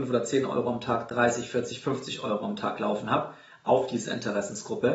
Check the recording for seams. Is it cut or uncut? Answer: uncut